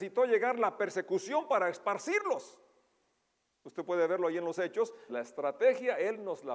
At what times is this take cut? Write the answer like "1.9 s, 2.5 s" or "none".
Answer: 5.1 s

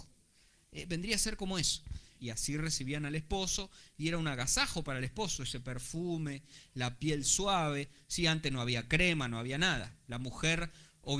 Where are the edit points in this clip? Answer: 2.2 s

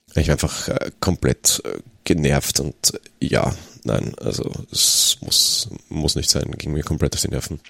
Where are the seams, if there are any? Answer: none

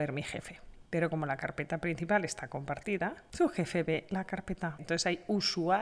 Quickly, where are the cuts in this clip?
4.8 s

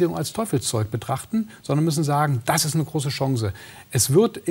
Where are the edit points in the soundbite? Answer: none

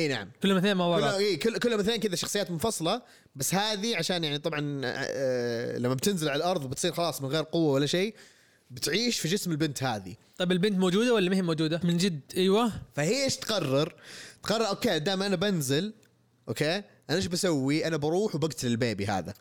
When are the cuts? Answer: 11.8 s

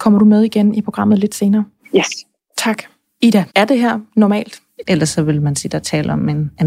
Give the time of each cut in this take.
3.5 s, 4.8 s

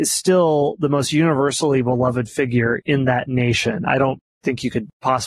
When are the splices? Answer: none

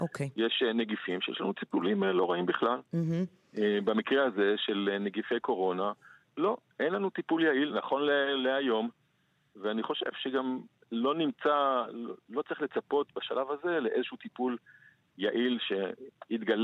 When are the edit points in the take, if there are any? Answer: none

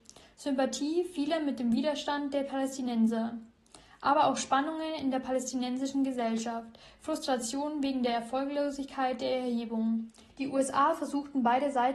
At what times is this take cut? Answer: 10.3 s

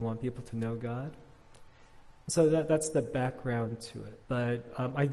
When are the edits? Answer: 2.2 s, 4.2 s

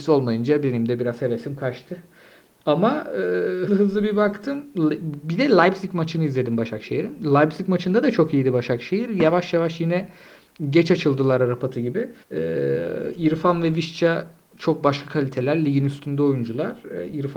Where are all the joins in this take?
3.7 s, 12.2 s

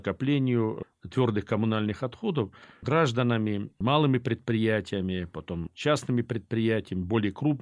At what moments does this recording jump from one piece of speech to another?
none

